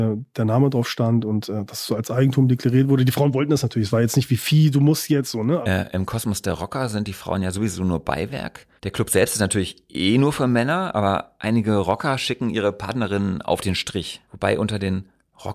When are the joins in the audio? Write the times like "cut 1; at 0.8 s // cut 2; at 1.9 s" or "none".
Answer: cut 1; at 5.6 s // cut 2; at 8.8 s // cut 3; at 14.2 s